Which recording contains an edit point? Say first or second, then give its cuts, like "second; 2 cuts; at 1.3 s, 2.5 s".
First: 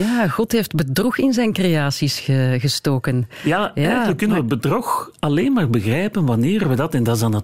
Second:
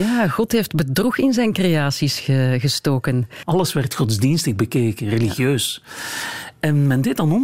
second; 1 cut; at 3.4 s